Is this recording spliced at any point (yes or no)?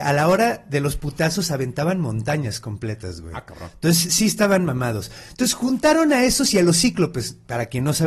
no